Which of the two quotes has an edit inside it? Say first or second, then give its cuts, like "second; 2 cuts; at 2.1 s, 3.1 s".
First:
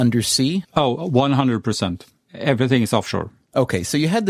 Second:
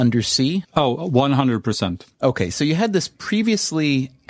second; 1 cut; at 2.1 s